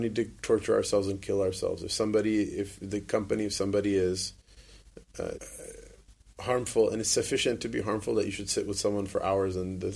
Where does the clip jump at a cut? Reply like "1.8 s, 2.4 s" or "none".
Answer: 5.3 s